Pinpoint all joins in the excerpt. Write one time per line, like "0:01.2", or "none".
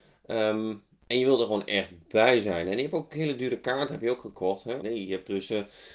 0:04.8